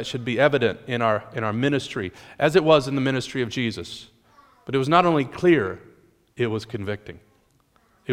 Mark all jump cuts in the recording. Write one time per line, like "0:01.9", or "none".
none